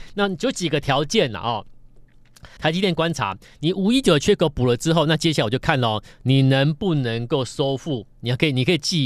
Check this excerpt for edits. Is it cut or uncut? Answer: cut